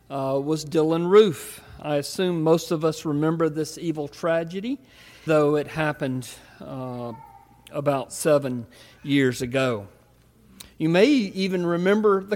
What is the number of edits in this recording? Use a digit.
1